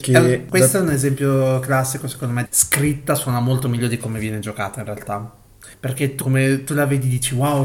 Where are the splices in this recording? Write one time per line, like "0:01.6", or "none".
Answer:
0:02.4
0:06.2